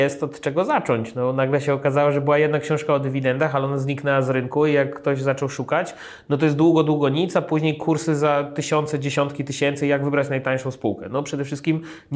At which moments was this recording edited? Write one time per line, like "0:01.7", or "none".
none